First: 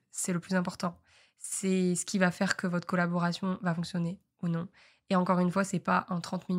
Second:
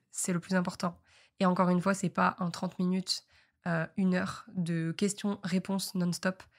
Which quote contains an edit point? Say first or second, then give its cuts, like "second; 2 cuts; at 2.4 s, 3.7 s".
second; 1 cut; at 1.3 s